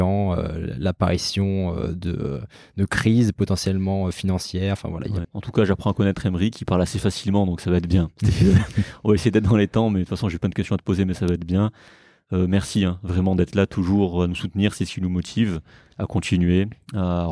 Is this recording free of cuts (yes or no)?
no